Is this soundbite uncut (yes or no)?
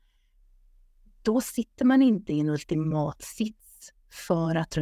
yes